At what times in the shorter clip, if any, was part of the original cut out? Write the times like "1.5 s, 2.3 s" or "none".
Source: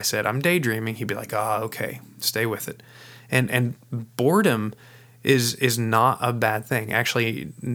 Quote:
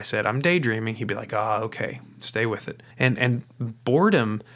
2.9 s